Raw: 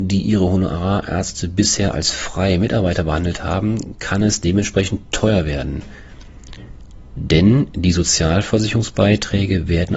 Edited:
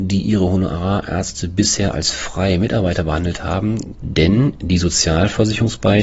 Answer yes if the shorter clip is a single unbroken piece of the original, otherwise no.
no